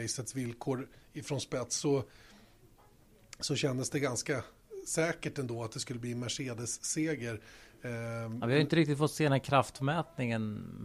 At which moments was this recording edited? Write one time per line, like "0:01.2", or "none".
none